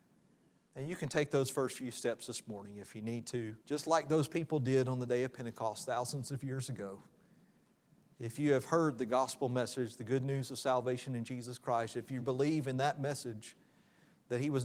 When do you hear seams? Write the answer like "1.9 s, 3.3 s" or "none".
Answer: 3.6 s, 12.2 s